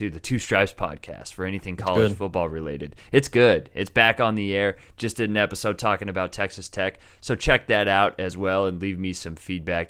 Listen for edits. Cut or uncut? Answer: uncut